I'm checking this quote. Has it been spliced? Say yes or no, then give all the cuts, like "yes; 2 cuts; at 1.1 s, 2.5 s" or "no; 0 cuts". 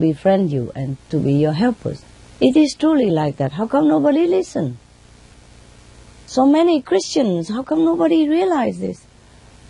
no; 0 cuts